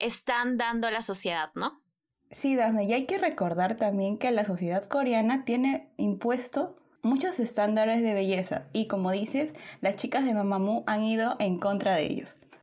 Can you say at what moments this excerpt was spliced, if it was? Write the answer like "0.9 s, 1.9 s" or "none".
none